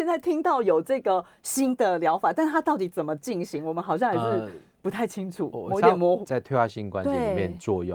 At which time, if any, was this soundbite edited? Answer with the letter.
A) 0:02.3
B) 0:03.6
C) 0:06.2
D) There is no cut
C